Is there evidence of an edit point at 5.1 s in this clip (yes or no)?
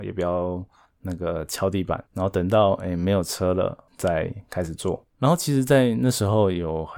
yes